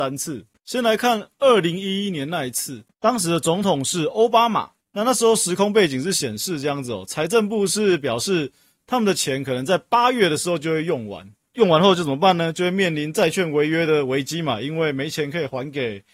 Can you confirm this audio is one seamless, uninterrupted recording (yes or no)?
yes